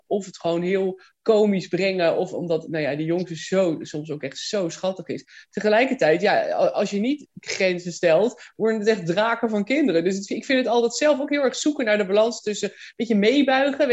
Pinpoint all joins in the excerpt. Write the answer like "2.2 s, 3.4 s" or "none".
none